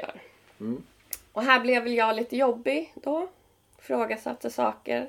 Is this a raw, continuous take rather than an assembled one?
yes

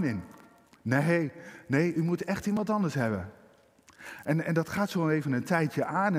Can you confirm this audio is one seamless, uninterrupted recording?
yes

